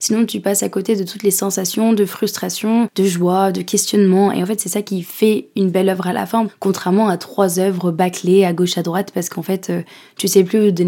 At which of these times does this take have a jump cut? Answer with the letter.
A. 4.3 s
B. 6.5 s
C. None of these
B